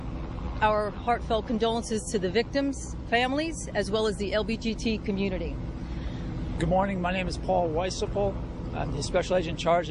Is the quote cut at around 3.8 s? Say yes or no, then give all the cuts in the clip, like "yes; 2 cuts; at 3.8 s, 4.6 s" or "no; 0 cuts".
no; 1 cut; at 6.6 s